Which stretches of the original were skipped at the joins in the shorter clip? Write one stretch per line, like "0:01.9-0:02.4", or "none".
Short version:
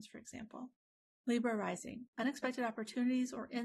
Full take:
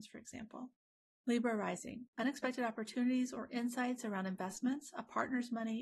none

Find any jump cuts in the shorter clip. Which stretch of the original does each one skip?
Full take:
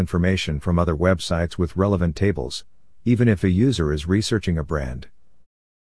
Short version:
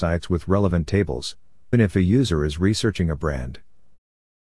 0:03.0-0:03.2

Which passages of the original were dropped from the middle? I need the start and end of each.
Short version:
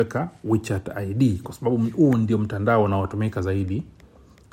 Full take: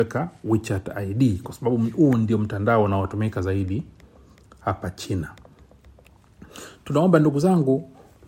none

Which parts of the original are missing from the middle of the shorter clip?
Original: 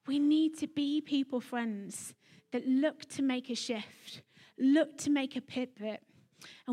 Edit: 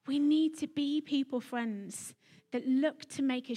none

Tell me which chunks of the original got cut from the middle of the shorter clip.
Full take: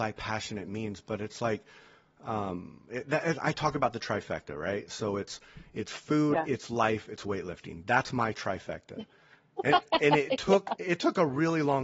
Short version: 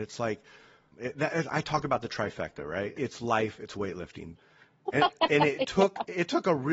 0:02.1-0:02.8
0:04.9-0:06.5
0:07.8-0:09.1

